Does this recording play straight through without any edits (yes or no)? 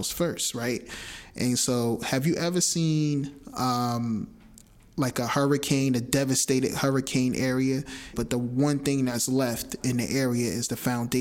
no